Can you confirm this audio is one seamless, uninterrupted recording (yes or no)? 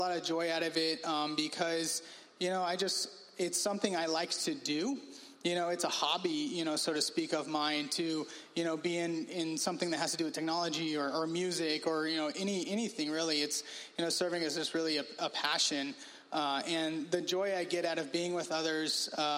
yes